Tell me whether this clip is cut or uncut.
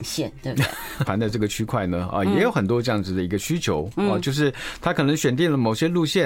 cut